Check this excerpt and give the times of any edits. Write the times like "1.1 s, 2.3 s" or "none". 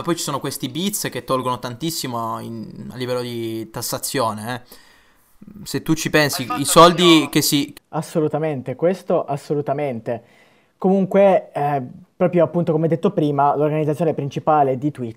7.7 s